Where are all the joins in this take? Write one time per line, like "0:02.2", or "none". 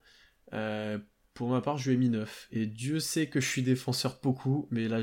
none

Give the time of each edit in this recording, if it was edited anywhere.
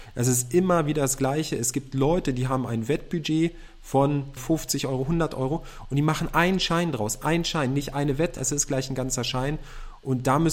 0:04.4
0:08.4

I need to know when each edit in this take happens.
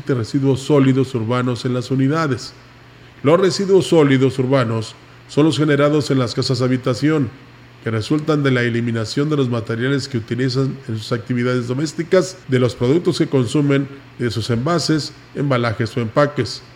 0:12.4

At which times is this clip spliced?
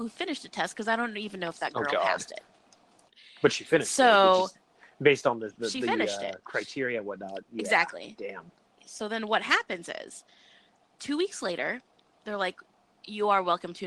0:08.8

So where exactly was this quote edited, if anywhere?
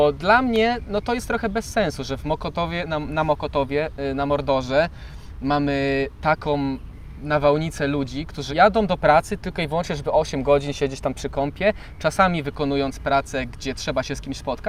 0:08.5

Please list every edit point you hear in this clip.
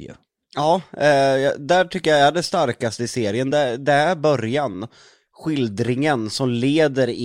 none

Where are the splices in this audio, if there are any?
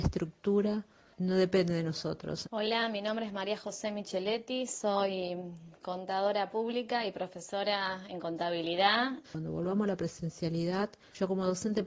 0:02.4
0:09.2

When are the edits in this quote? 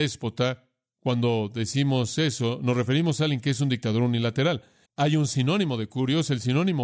0:04.8

